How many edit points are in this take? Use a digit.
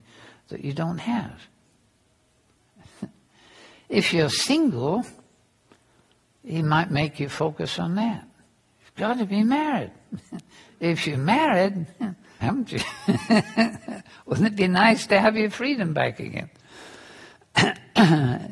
2